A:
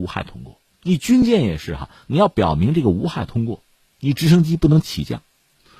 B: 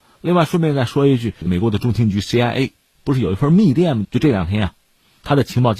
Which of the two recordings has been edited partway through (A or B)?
B